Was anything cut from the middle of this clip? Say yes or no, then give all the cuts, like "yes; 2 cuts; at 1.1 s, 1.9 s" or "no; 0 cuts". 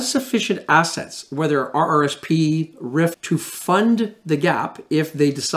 yes; 1 cut; at 3.1 s